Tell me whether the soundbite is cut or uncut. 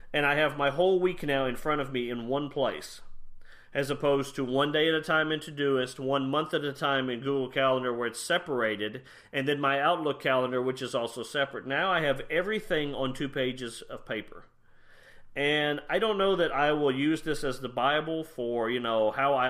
uncut